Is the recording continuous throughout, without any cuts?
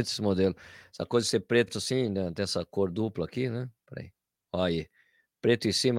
yes; 0 cuts

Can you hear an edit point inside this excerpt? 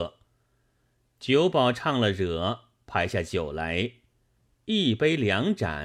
no; 0 cuts

